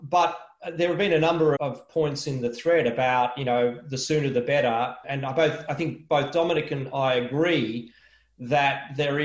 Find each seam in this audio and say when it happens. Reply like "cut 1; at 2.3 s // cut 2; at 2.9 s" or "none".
cut 1; at 1.6 s // cut 2; at 5.0 s